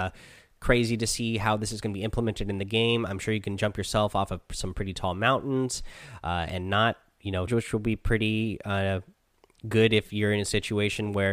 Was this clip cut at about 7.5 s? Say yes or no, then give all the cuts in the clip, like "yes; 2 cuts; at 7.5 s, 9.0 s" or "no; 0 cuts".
yes; 1 cut; at 7.5 s